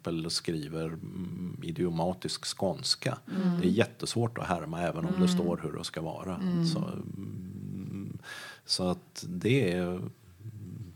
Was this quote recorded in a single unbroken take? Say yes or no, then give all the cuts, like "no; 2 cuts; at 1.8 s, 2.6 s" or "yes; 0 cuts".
yes; 0 cuts